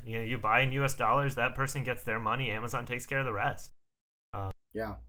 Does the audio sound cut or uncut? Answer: uncut